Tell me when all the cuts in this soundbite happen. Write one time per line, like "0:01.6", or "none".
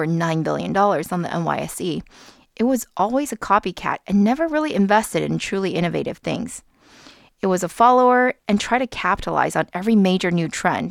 none